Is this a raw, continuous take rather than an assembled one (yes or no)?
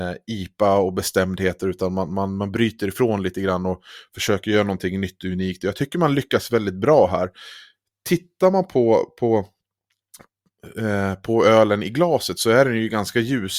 yes